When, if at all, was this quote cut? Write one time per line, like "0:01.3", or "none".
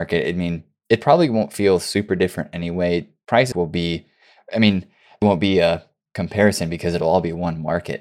0:03.5
0:05.2